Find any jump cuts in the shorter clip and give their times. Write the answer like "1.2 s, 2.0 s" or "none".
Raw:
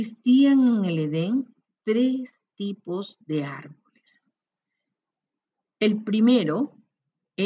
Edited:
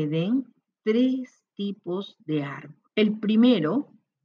2.9 s